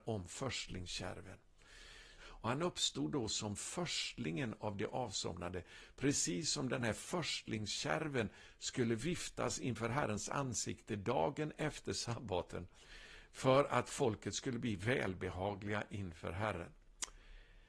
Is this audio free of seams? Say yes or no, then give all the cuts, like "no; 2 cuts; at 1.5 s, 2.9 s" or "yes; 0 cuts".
no; 1 cut; at 2.2 s